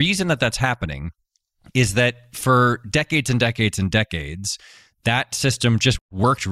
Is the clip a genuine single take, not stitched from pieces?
yes; 0 cuts

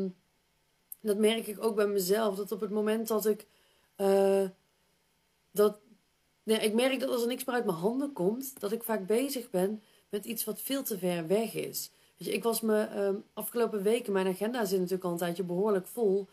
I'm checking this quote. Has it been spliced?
no; 0 cuts

